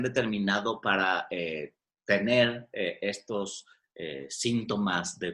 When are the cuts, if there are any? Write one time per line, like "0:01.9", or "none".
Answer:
none